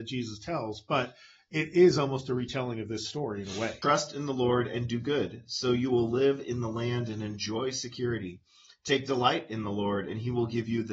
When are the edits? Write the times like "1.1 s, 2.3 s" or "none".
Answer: 3.8 s